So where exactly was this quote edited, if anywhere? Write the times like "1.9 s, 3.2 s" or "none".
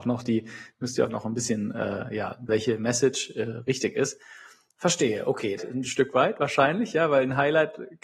2.5 s, 5.6 s